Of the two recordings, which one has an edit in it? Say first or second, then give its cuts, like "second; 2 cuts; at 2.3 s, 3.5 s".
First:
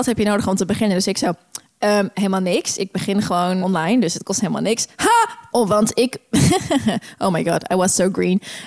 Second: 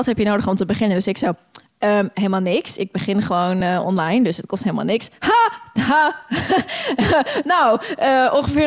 first; 2 cuts; at 3.6 s, 5.5 s